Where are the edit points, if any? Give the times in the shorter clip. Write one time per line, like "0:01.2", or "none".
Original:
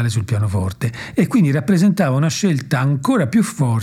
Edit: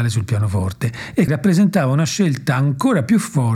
0:01.3